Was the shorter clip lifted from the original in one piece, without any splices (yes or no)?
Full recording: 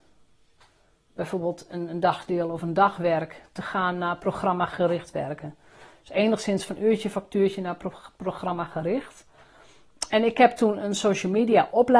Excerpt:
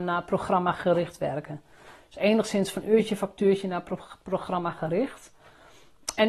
yes